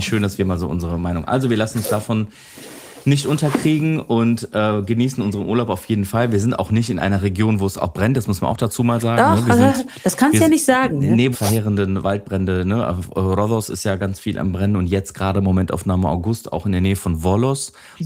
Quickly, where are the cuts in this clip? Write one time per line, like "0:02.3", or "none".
0:11.3